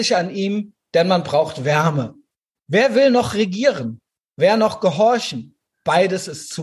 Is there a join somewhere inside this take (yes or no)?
yes